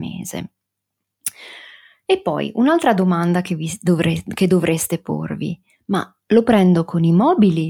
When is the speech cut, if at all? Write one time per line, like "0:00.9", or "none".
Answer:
none